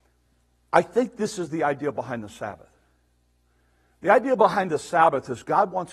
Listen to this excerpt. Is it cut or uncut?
uncut